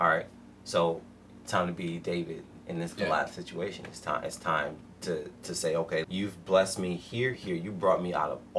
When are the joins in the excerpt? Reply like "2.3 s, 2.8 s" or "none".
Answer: 6.0 s, 7.3 s